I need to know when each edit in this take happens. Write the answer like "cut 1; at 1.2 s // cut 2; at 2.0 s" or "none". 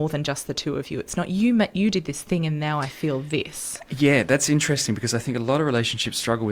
none